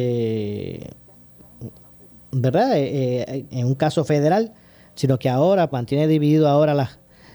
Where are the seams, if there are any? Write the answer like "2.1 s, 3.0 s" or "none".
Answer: 3.5 s, 5.7 s